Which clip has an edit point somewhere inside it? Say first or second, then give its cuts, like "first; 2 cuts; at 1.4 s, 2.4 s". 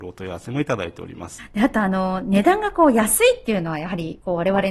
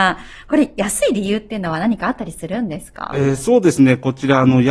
first; 1 cut; at 1.4 s